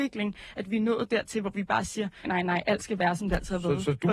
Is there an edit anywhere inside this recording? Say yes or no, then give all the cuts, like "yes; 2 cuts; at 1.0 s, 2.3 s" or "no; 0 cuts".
yes; 1 cut; at 2.2 s